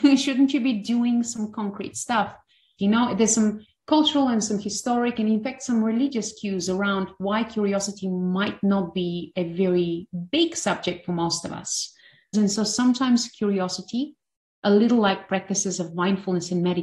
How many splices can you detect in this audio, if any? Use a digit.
2